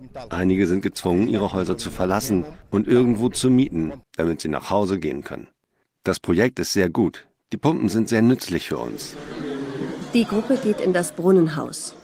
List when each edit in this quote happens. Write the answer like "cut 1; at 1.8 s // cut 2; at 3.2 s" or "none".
cut 1; at 4.0 s